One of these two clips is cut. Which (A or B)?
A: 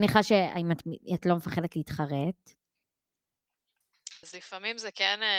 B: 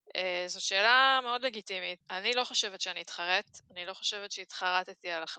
A